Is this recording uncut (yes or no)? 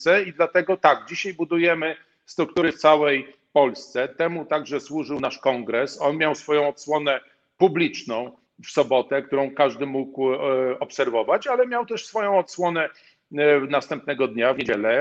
yes